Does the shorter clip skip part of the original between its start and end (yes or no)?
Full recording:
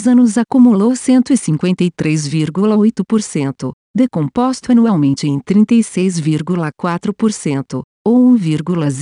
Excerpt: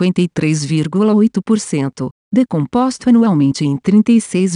no